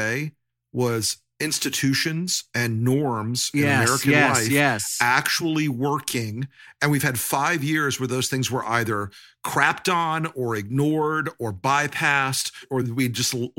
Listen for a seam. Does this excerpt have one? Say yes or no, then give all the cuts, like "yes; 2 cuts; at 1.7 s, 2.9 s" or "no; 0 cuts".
no; 0 cuts